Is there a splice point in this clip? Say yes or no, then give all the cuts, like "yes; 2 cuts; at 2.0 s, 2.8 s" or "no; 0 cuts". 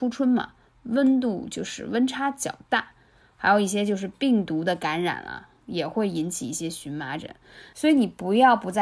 yes; 1 cut; at 7.7 s